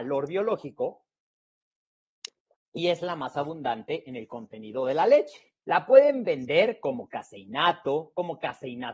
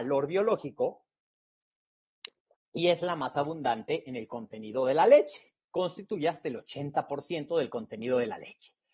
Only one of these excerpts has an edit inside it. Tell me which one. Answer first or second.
first